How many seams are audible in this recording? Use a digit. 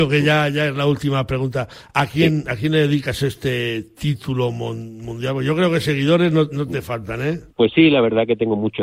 1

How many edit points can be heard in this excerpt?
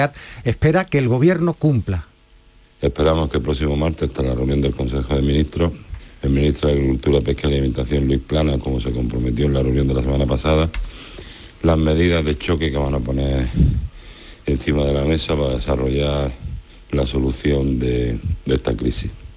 1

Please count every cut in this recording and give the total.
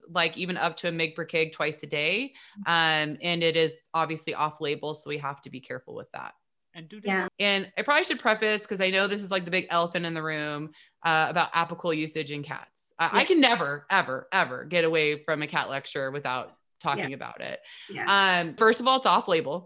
2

